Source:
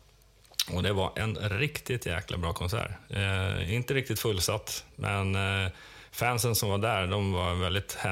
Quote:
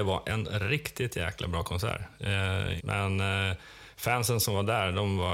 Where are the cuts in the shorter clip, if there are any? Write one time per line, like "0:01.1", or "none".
0:02.8